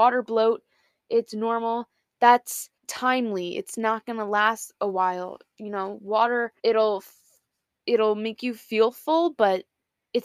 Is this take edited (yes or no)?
yes